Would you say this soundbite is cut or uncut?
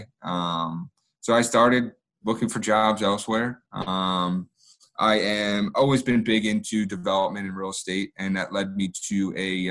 uncut